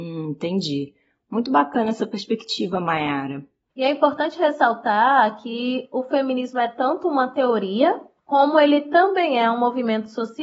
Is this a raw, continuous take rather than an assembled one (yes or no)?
no